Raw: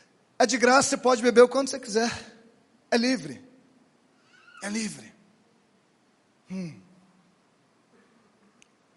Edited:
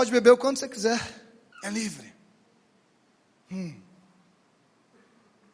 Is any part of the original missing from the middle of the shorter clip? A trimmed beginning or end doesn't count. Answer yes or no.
yes